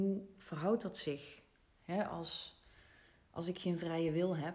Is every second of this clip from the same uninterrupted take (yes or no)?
yes